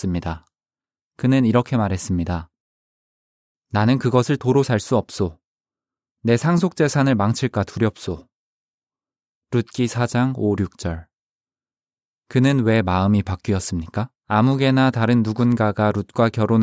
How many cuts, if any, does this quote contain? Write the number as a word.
one